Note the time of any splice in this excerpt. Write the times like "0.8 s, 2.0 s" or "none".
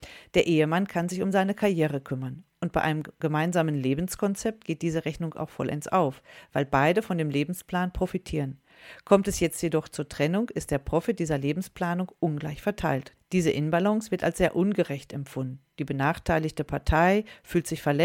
13.2 s

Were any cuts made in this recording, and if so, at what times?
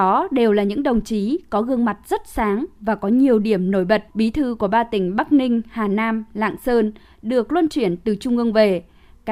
4.1 s

